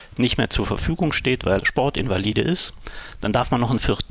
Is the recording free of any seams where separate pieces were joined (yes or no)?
no